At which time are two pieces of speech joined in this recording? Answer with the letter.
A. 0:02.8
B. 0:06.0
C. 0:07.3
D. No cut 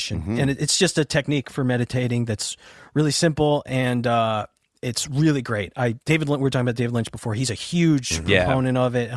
B